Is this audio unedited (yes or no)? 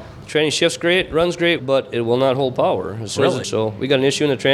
no